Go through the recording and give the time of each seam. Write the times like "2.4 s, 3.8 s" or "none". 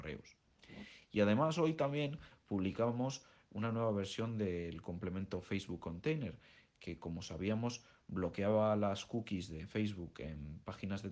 none